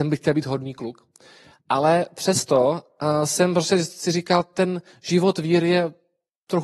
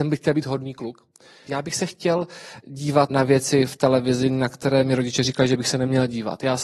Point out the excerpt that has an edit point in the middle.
second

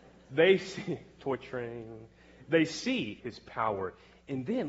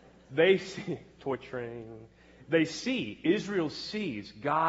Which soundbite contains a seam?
first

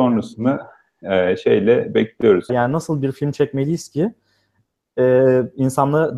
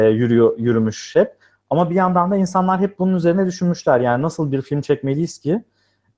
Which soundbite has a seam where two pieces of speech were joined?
first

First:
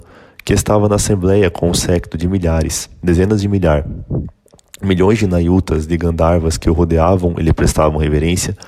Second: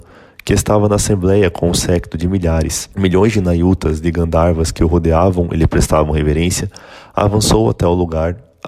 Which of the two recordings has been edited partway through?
second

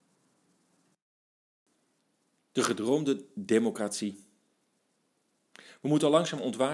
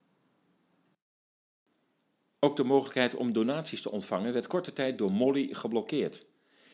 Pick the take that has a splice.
second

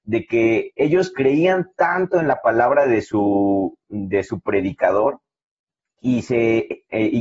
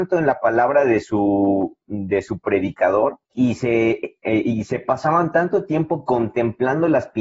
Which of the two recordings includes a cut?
second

